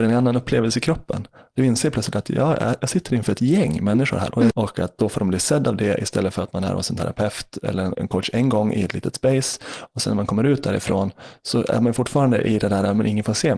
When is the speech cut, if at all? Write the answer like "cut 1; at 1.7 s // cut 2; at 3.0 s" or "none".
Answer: cut 1; at 4.5 s // cut 2; at 7.9 s